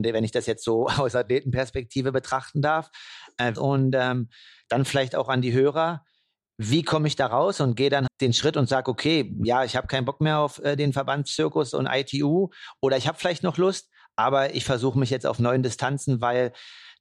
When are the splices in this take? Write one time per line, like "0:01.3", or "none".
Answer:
0:03.6
0:08.1